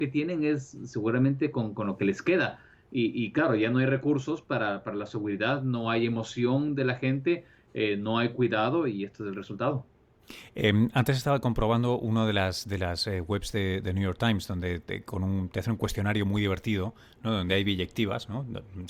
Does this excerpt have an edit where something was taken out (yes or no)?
no